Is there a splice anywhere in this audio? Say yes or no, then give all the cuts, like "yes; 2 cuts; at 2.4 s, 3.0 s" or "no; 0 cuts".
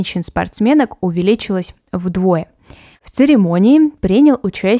yes; 1 cut; at 2.9 s